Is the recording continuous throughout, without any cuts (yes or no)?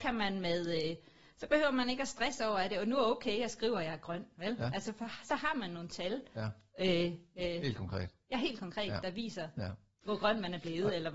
yes